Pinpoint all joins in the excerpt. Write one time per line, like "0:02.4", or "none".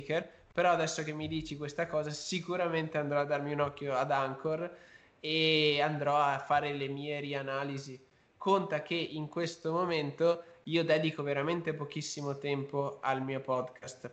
none

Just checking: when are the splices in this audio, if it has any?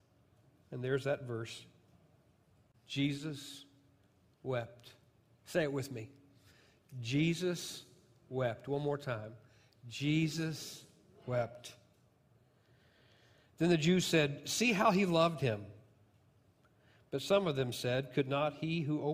none

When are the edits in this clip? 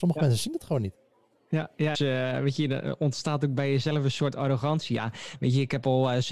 0:01.9

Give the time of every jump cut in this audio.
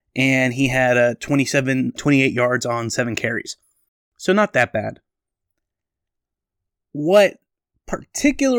0:02.0

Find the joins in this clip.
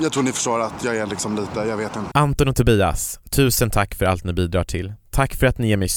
0:02.1

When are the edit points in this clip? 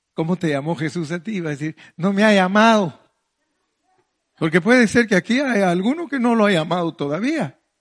none

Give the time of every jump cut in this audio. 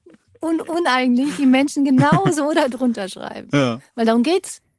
none

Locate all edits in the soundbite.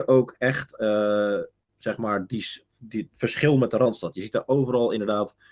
none

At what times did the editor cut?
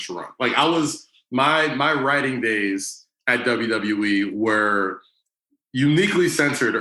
none

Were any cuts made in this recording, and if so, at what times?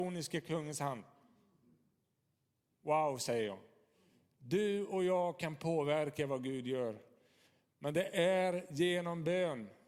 none

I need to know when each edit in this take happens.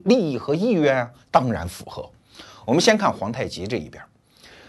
none

